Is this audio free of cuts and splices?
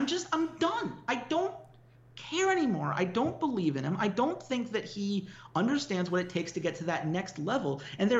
yes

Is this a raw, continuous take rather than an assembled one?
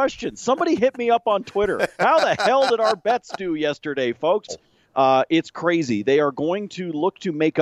no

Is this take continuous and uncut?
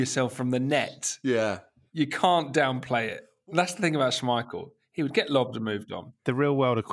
yes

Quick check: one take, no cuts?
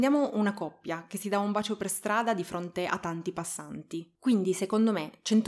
no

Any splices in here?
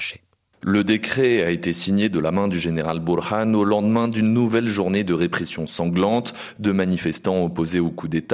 no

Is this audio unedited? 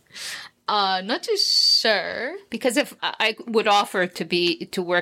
no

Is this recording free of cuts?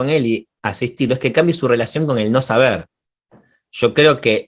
yes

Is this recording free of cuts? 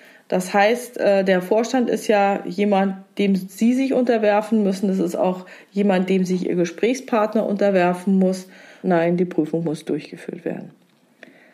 no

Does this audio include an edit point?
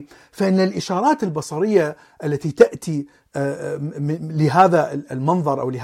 no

